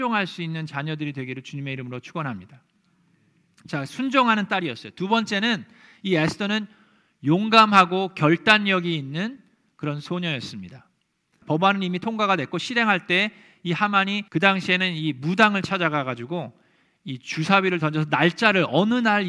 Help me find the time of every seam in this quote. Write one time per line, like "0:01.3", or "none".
0:11.4
0:14.3